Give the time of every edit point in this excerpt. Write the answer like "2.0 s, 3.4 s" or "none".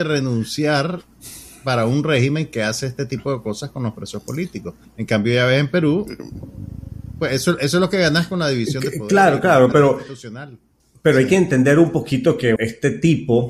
9.7 s, 12.6 s